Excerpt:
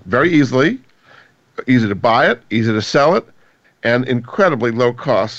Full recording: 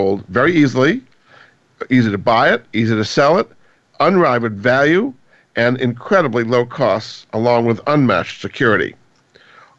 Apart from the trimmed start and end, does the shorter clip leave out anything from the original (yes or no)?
yes